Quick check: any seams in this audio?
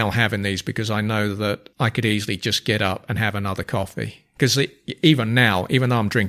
yes; 1 cut; at 1.7 s

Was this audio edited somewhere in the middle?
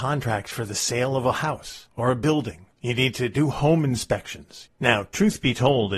yes; 1 cut; at 4.7 s

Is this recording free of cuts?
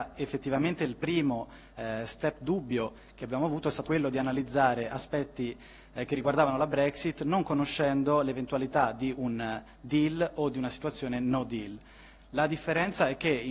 no; 1 cut; at 3.8 s

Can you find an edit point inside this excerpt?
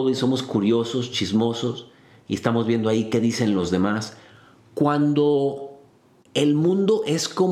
no; 0 cuts

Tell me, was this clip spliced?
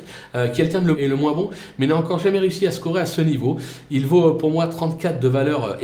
yes; 1 cut; at 0.9 s

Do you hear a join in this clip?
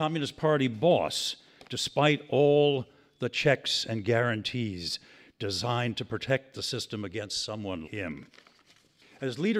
yes; 1 cut; at 7.8 s

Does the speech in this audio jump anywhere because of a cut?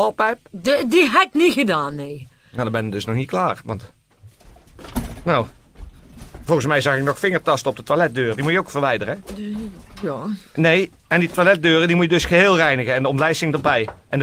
no; 0 cuts

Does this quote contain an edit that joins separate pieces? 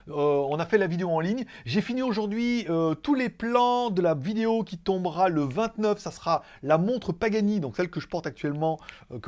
no; 0 cuts

